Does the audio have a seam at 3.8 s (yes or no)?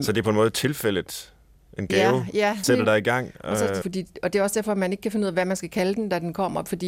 yes